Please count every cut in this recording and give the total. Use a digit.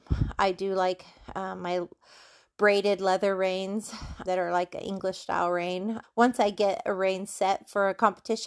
2